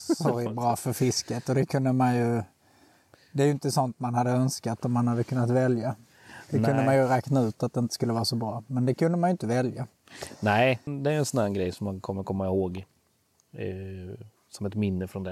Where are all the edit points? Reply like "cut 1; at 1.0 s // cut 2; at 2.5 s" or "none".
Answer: cut 1; at 10.9 s